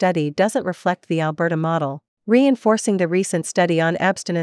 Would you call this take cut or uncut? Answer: cut